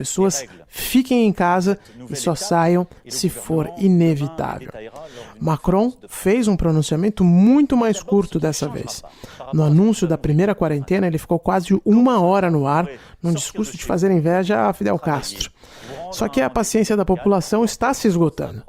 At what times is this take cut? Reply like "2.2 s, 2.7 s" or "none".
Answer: none